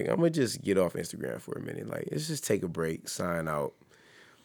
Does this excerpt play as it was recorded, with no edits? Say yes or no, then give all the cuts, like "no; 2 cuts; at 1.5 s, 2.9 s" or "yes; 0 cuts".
yes; 0 cuts